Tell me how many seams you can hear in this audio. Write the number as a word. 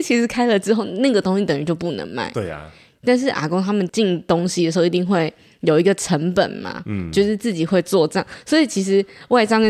one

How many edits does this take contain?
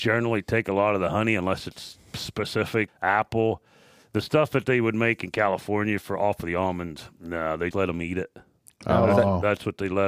two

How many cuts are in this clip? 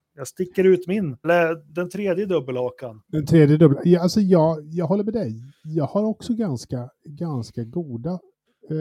one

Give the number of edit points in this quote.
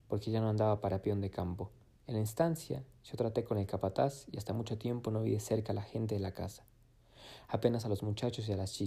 one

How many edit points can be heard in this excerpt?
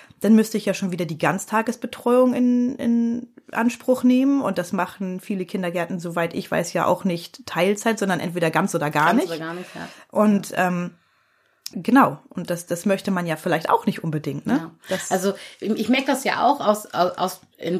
one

